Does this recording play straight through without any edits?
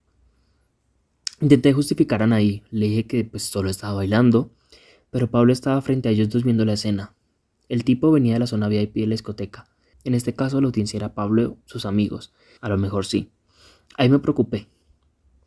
no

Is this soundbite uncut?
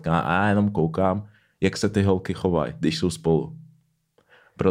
yes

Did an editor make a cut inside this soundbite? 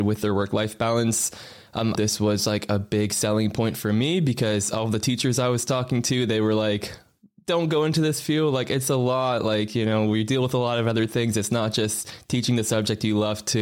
yes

